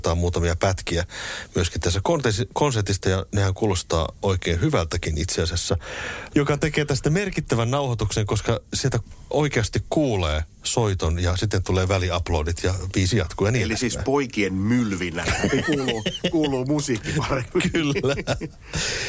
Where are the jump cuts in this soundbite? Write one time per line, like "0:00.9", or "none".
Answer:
0:06.3